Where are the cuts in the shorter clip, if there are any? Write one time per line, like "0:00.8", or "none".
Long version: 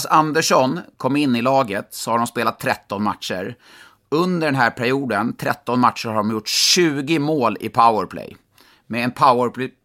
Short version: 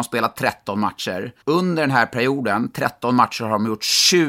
0:01.4